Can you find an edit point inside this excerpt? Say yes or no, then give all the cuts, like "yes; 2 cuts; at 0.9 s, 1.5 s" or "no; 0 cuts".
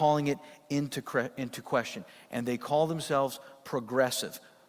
no; 0 cuts